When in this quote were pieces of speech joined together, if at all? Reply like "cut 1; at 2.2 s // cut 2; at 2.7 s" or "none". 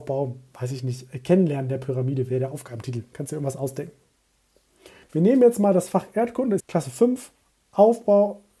cut 1; at 5.0 s // cut 2; at 6.6 s

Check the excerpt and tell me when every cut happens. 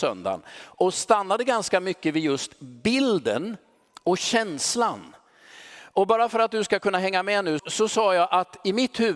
cut 1; at 7.6 s

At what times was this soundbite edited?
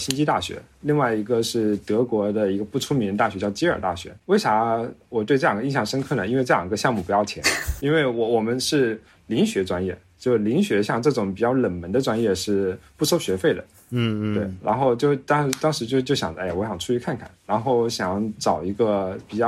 none

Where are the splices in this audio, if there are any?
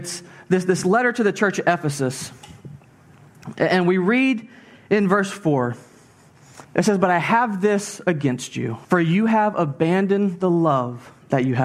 cut 1; at 6.6 s // cut 2; at 8.8 s

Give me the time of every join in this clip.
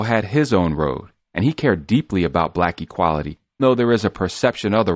cut 1; at 3.6 s

